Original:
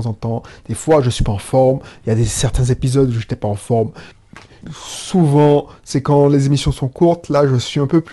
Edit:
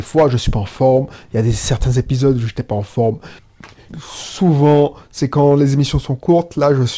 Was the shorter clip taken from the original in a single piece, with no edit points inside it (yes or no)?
yes